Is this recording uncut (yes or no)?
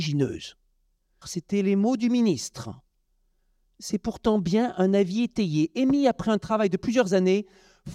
no